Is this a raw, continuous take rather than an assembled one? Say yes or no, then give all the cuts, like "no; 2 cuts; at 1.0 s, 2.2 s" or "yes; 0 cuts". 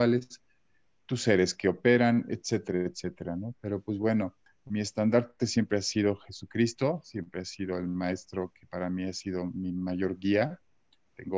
yes; 0 cuts